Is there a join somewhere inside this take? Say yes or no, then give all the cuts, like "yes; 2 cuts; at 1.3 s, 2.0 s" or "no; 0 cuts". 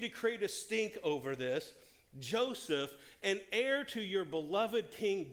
no; 0 cuts